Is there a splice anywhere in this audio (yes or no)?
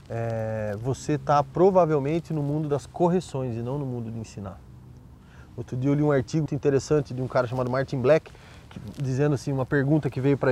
yes